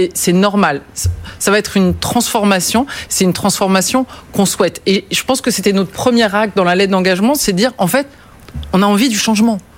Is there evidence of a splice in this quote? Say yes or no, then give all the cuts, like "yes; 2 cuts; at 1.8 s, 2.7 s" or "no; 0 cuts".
no; 0 cuts